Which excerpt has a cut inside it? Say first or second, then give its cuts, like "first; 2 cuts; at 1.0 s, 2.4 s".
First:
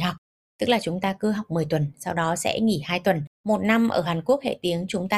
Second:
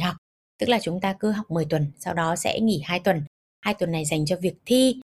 first; 1 cut; at 3.3 s